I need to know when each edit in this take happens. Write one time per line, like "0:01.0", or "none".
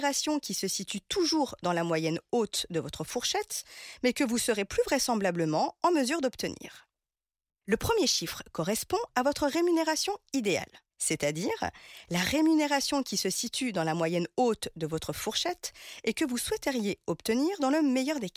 0:07.5
0:10.9